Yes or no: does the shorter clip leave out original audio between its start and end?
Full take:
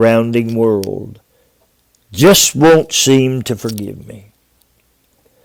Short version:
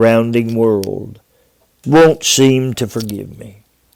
yes